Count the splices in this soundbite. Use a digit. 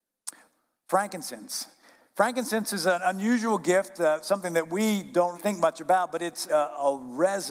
2